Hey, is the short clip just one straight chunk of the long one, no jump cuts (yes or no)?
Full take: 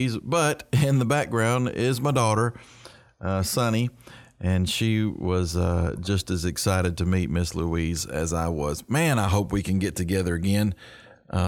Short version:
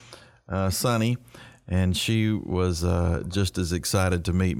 yes